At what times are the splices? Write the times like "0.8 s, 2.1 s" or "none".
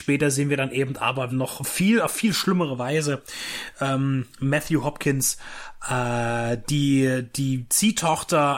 1.3 s